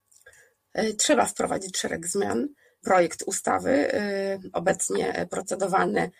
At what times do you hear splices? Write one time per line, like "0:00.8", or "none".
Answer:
0:02.8